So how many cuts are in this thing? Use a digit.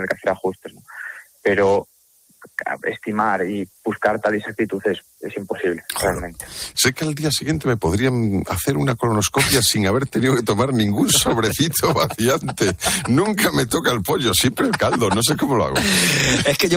2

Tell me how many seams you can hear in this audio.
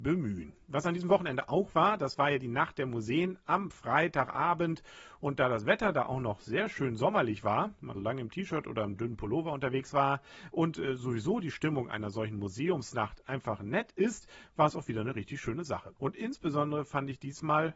2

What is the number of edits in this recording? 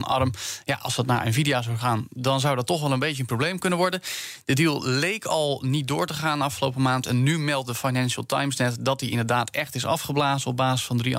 0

